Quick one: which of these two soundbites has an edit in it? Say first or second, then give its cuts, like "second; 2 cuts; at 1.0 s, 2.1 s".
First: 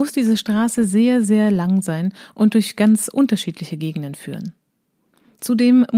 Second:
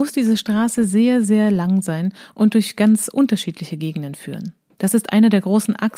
second; 1 cut; at 4.7 s